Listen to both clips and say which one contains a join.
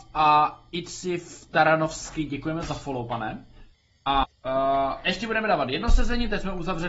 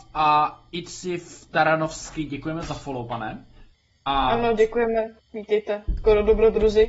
first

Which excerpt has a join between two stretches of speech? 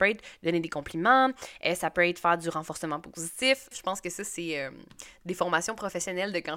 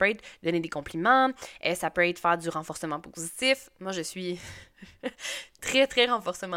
first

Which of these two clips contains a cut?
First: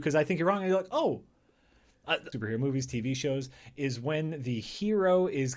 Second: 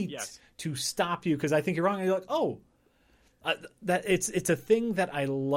first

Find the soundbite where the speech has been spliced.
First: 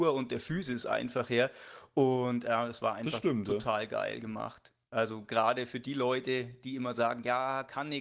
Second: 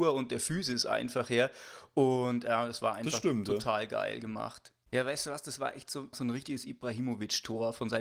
second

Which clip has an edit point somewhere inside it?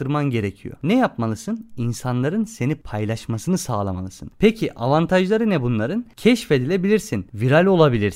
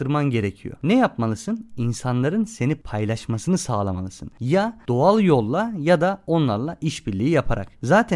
first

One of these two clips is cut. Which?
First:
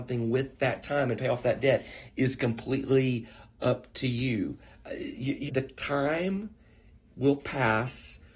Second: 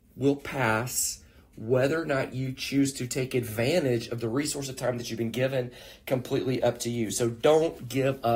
first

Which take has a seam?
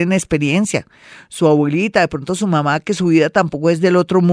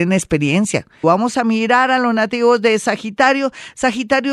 second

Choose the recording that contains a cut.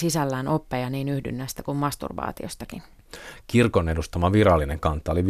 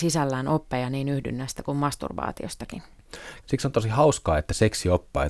second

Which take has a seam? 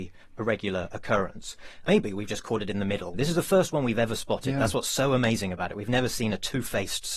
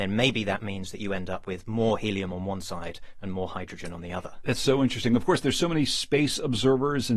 first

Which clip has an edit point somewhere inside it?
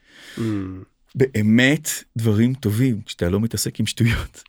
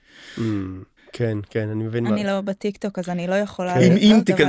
second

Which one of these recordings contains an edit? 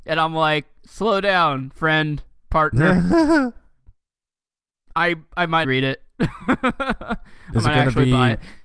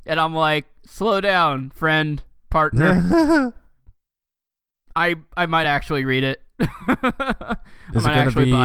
first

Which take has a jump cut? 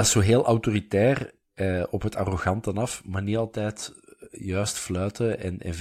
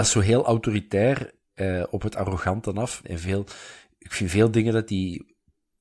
second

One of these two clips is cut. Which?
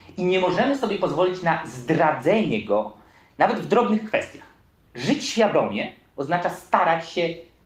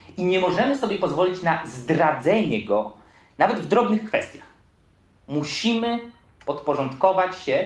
first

